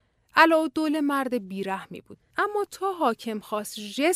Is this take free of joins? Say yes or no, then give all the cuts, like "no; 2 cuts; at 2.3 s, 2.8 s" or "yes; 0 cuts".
no; 1 cut; at 2.2 s